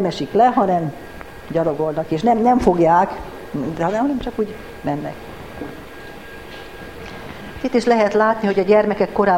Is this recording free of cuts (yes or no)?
yes